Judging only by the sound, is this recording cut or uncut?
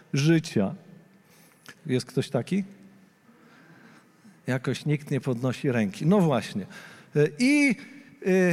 cut